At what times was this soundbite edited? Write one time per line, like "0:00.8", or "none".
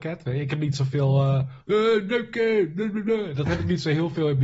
none